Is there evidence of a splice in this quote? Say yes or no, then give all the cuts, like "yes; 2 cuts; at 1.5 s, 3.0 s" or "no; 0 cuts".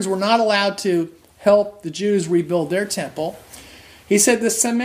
no; 0 cuts